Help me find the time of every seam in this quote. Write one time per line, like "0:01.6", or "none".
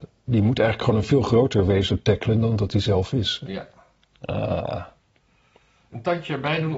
0:03.4